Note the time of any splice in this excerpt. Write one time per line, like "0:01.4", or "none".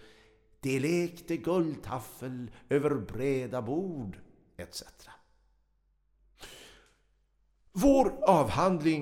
none